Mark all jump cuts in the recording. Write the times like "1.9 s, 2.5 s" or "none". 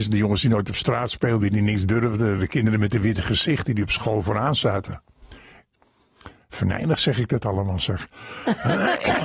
none